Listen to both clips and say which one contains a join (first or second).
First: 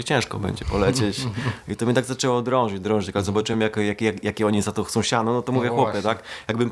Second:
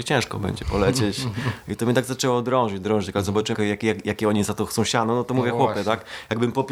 second